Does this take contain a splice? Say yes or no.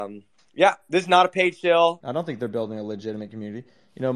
yes